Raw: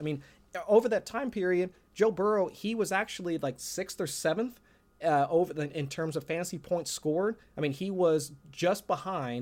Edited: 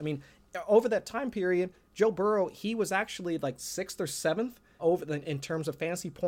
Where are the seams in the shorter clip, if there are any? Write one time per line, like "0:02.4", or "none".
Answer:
0:04.8